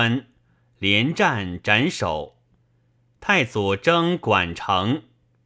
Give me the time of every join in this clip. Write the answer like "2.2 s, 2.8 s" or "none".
3.2 s